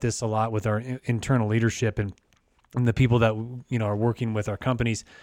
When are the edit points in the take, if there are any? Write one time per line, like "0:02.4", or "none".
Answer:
none